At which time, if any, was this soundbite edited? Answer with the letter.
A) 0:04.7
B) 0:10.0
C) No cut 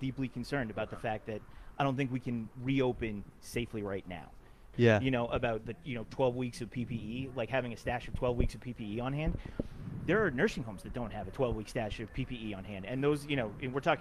A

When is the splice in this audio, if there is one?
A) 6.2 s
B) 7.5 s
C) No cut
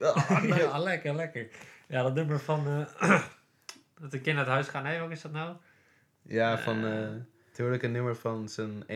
B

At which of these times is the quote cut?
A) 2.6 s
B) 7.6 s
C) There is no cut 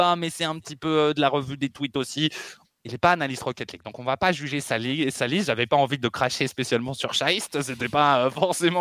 A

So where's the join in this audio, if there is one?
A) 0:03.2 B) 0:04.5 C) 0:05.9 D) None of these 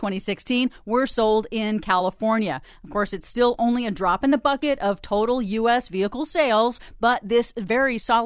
D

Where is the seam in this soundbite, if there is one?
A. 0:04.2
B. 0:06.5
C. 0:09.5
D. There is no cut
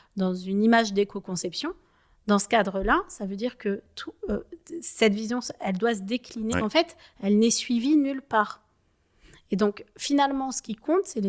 B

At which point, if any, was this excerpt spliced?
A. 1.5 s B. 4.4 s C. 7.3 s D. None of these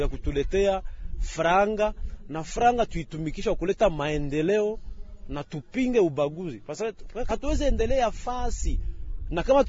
C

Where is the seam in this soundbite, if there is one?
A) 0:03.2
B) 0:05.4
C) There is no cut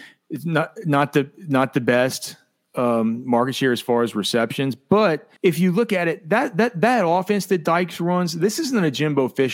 B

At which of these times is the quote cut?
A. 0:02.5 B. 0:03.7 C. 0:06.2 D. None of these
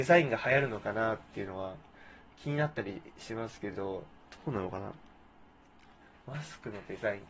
D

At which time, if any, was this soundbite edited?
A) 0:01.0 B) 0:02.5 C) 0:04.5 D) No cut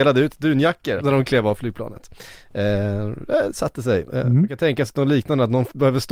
A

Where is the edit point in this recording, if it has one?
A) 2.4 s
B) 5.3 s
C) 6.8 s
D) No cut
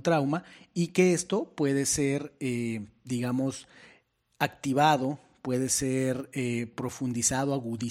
D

